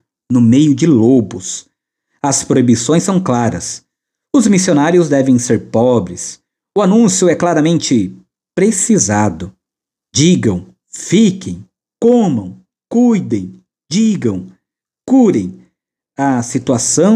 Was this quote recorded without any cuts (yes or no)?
yes